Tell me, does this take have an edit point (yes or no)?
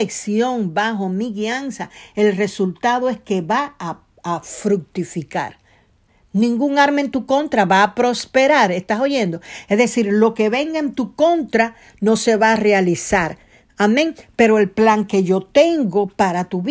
no